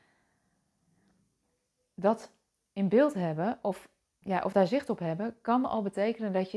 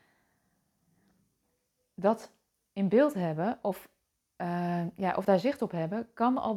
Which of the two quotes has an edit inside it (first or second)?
first